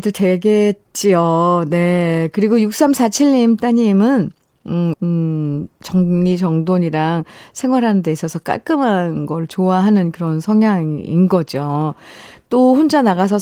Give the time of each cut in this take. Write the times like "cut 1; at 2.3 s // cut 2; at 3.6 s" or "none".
cut 1; at 4.9 s